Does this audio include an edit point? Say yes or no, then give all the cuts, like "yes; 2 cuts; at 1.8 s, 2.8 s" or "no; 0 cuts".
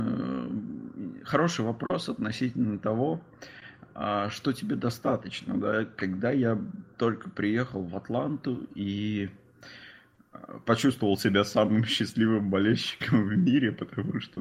yes; 1 cut; at 6.9 s